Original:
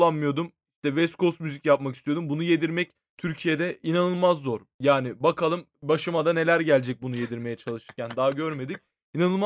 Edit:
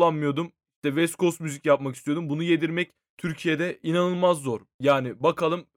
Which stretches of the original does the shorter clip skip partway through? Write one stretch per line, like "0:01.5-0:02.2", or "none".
none